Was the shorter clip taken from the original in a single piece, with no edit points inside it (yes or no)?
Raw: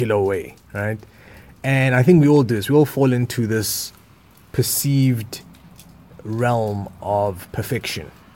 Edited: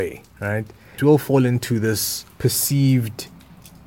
no